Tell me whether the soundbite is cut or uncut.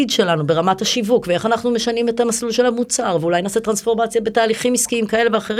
uncut